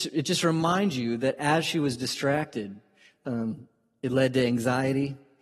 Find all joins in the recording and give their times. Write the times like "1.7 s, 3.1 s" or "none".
none